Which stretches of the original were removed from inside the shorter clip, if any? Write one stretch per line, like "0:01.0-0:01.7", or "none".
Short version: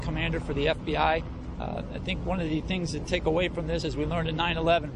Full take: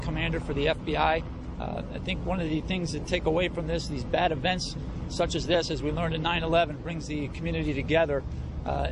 0:03.8-0:05.7